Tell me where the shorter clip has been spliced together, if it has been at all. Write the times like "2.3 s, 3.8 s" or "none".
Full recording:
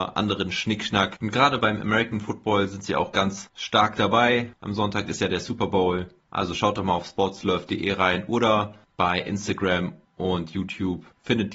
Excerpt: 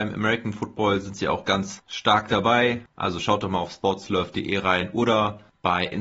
2.9 s